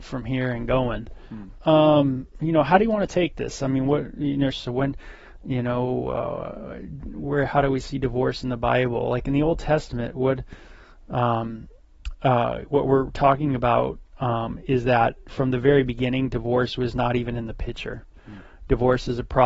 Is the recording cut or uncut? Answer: cut